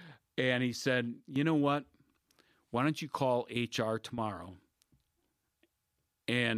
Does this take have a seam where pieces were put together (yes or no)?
no